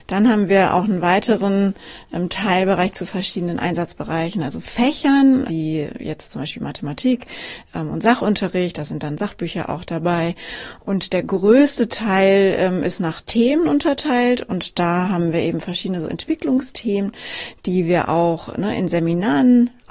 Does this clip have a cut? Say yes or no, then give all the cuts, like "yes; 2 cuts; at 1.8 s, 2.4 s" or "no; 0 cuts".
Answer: yes; 1 cut; at 5.5 s